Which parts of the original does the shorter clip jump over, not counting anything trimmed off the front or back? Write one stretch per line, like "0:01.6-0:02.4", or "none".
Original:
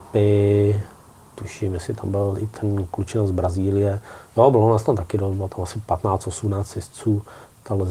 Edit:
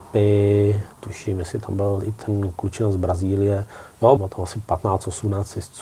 0:00.9-0:01.3
0:04.5-0:05.4